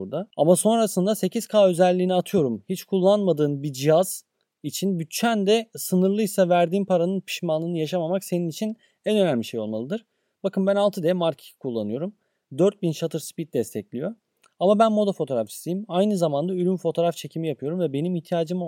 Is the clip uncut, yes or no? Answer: yes